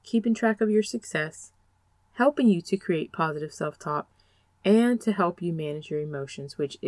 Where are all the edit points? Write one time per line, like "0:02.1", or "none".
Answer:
none